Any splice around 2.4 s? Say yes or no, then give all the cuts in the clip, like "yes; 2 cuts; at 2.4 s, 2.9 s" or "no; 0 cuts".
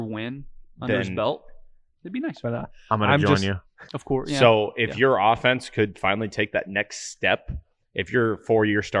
yes; 2 cuts; at 2.4 s, 3.9 s